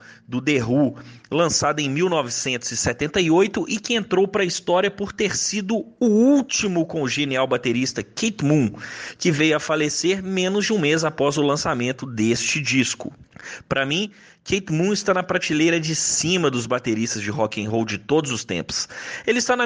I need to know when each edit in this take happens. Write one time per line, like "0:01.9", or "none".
0:01.2